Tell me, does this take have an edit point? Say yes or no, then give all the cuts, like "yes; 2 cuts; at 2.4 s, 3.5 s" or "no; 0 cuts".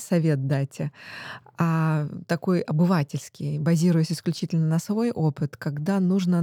no; 0 cuts